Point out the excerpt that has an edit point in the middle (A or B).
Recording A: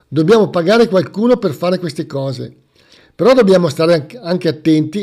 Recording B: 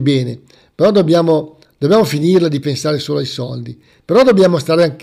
B